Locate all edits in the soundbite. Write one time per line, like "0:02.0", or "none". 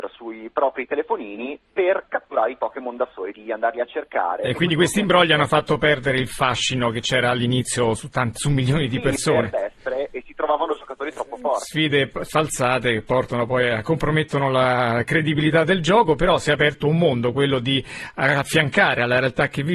0:03.3
0:09.5